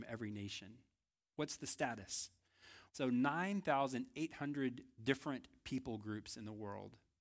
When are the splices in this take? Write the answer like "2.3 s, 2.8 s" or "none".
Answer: 2.9 s